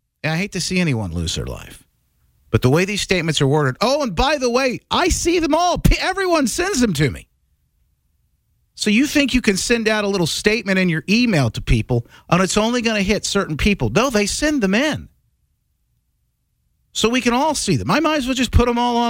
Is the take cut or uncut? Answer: uncut